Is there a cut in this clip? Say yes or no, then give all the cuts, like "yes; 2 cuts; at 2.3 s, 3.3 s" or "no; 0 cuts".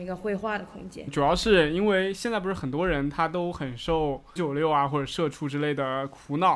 yes; 2 cuts; at 1.1 s, 4.4 s